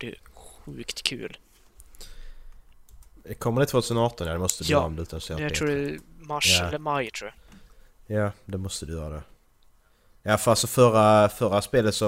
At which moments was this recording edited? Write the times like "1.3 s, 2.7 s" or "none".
none